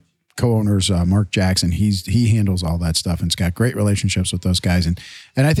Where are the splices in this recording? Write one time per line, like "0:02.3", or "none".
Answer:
none